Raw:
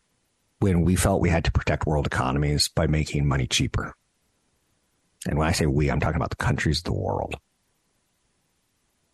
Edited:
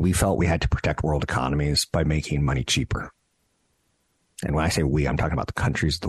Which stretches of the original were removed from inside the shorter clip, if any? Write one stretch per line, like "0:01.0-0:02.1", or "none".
none